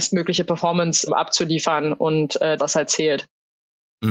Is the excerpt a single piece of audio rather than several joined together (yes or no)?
no